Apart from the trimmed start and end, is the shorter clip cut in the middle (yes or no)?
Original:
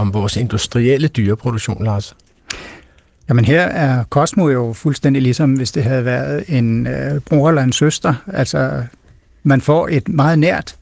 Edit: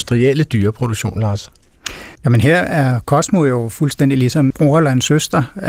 yes